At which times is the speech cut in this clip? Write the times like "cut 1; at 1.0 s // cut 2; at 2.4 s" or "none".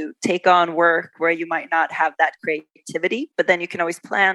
cut 1; at 1.1 s